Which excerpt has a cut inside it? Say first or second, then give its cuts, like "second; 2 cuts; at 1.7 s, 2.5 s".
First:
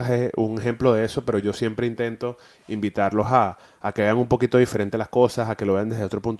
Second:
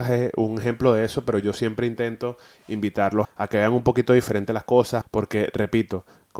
second; 2 cuts; at 3.2 s, 5.0 s